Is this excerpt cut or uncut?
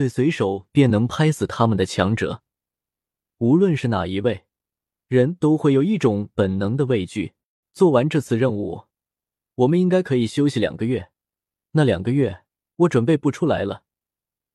cut